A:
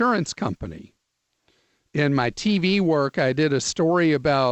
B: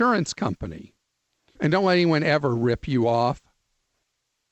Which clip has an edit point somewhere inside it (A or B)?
B